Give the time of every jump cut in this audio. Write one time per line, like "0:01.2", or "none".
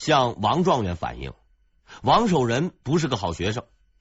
none